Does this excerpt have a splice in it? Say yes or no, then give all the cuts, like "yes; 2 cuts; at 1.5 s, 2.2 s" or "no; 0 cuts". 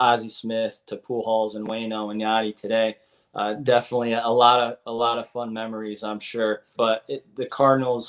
yes; 1 cut; at 6.8 s